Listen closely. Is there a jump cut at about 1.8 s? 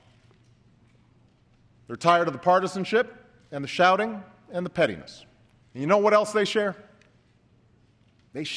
no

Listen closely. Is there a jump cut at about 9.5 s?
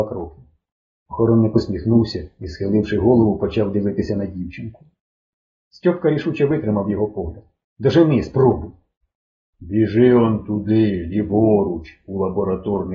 yes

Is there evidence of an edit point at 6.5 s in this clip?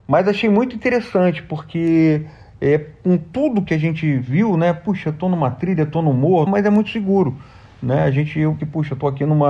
yes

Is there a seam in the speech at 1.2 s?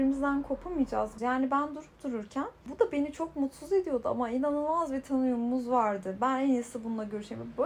yes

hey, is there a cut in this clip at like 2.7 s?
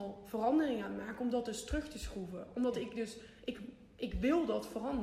no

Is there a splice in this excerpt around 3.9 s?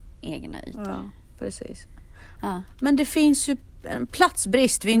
no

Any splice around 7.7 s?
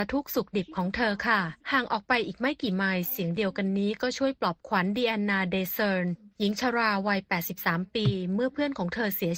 no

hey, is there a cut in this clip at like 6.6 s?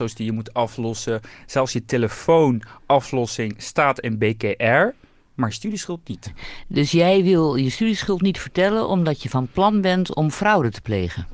no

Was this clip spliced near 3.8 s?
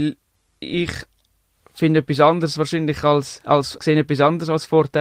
yes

